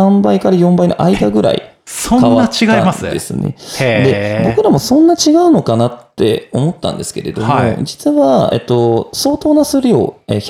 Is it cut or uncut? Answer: uncut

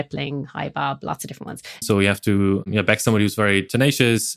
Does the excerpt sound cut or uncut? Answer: cut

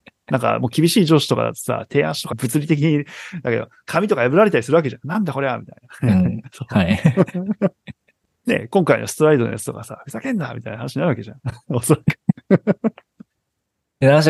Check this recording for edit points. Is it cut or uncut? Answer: uncut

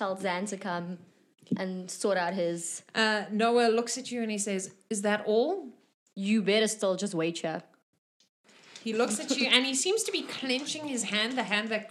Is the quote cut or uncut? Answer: uncut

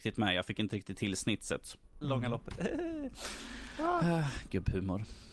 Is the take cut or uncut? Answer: cut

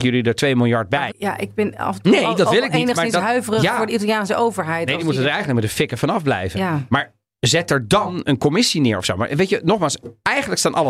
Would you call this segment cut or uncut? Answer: cut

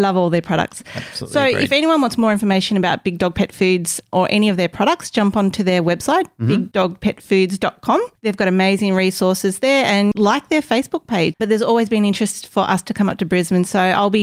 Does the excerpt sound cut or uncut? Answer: cut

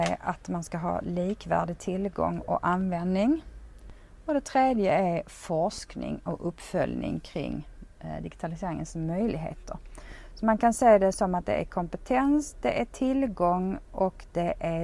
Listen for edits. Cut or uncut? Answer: uncut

